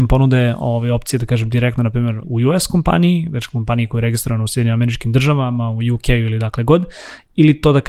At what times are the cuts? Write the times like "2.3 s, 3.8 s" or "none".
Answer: 2.2 s